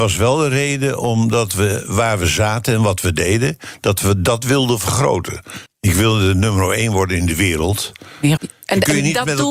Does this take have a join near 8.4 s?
yes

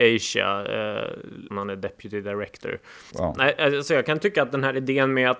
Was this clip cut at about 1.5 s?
yes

